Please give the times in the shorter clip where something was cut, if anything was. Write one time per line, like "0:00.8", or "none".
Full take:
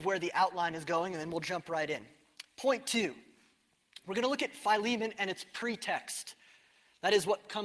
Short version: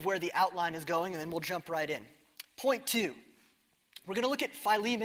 none